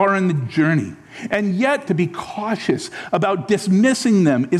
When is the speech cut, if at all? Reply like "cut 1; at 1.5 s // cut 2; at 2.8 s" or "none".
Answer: cut 1; at 1.9 s